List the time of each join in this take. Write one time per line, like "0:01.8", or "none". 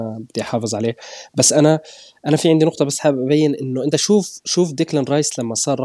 none